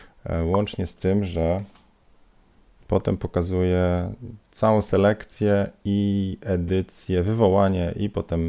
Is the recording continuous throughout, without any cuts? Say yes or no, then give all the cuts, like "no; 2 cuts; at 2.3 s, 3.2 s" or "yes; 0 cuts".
yes; 0 cuts